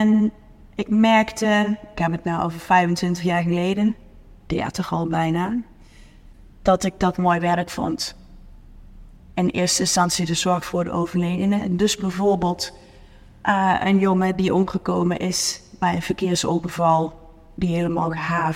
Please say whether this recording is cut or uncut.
uncut